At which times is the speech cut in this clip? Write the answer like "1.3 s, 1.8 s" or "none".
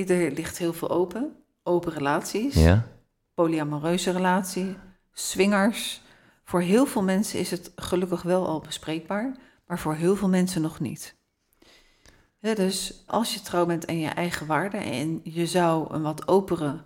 13.1 s